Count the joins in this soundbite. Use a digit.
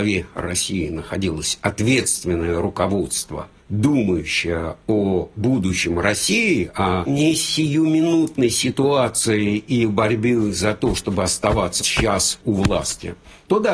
1